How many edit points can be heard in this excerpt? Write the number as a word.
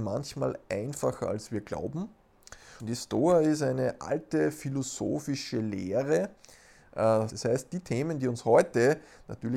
two